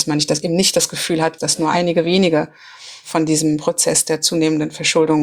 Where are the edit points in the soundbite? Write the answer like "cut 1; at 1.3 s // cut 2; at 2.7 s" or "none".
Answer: cut 1; at 1.4 s